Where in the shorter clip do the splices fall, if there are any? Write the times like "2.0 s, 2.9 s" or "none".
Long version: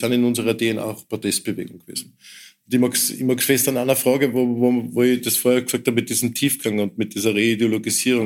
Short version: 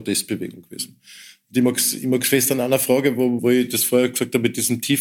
3.4 s